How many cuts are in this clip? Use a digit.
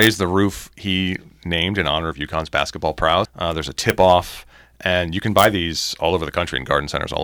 1